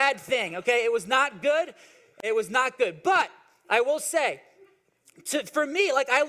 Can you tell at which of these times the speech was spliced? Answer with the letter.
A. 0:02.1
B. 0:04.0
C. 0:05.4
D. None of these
D